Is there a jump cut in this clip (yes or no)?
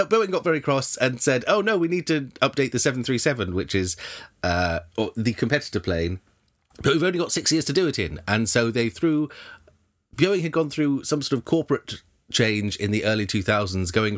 no